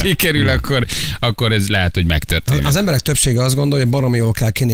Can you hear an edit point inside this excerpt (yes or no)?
no